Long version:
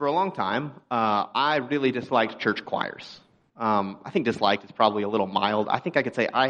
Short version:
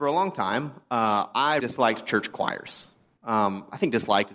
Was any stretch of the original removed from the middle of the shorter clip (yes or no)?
yes